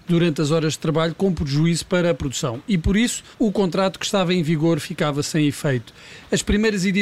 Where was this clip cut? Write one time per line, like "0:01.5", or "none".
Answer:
0:03.3